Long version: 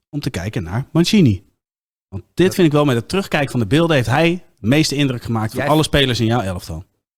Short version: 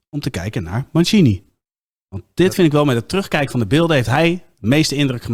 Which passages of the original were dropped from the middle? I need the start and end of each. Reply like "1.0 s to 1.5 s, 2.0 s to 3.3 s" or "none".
none